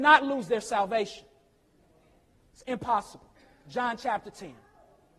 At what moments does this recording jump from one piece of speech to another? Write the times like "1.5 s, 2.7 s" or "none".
none